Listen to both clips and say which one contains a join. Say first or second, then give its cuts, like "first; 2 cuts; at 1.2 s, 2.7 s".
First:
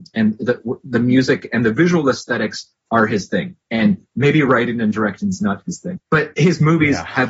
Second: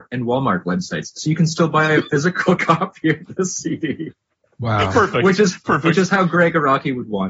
first; 1 cut; at 6.0 s